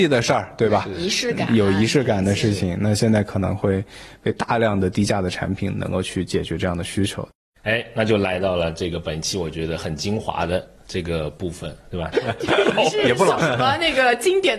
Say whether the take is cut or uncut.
cut